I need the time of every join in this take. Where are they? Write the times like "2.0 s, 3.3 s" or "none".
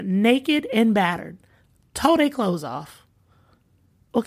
none